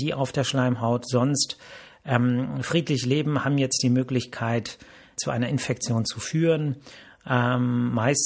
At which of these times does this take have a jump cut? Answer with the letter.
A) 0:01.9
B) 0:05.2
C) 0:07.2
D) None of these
B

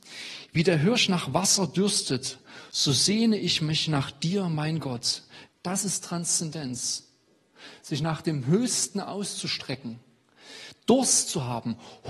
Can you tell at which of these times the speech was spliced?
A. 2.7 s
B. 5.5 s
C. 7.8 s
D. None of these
B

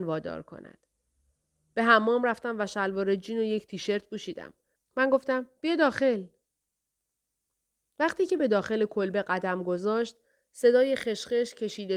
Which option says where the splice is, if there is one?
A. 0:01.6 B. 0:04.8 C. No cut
B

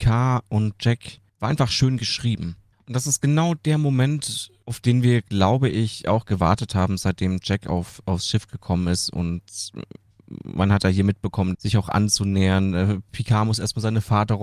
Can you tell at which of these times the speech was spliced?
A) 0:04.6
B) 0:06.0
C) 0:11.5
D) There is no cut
C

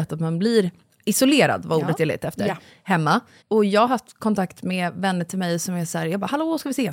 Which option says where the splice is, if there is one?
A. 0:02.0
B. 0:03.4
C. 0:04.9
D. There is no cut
D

